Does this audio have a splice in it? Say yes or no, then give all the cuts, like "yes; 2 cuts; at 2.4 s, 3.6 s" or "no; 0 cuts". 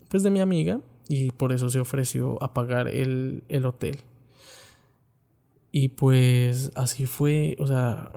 no; 0 cuts